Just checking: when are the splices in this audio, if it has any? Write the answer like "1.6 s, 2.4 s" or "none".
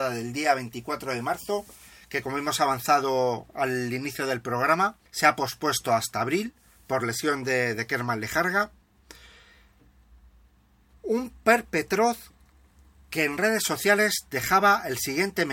5.1 s